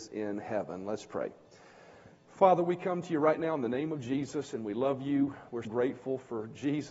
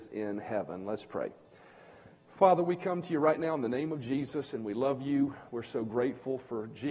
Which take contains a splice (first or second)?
first